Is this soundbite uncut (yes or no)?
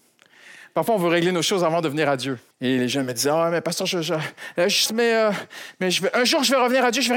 no